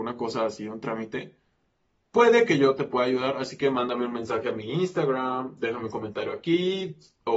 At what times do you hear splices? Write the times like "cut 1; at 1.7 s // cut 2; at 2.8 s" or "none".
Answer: none